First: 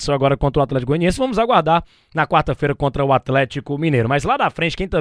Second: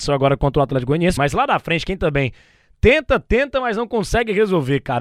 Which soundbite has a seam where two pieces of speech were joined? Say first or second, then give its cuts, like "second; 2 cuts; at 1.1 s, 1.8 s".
second; 1 cut; at 1.2 s